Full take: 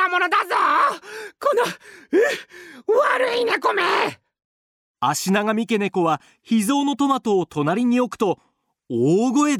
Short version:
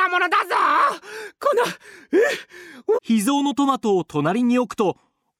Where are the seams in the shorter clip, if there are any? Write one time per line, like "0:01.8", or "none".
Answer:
0:02.9